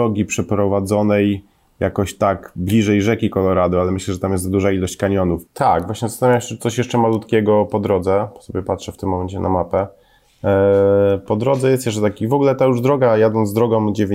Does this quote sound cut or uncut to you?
cut